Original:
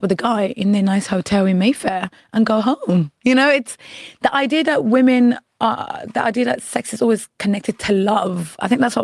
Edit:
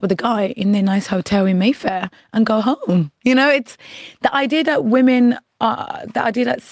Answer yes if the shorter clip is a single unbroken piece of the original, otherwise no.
yes